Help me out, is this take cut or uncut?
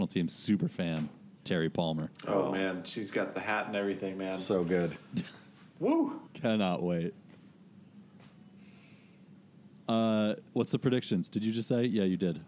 cut